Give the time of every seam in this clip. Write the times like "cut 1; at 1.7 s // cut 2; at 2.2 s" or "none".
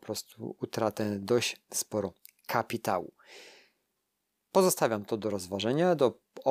none